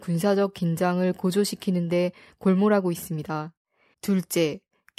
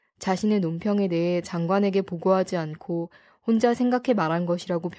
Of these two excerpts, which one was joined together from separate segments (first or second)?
first